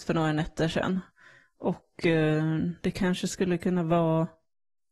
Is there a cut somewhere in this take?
no; 0 cuts

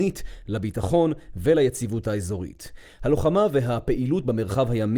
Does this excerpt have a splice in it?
no; 0 cuts

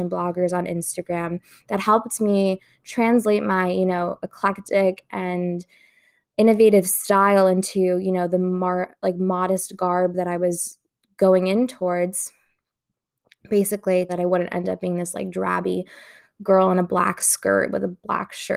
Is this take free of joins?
no; 1 cut; at 14.1 s

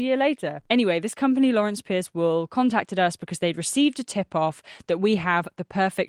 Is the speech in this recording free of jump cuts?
yes; 0 cuts

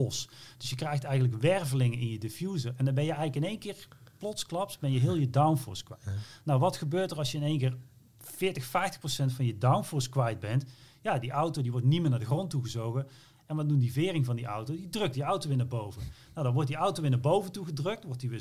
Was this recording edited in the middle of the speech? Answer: no; 0 cuts

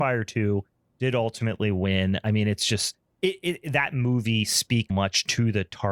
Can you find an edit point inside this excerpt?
yes; 1 cut; at 4.9 s

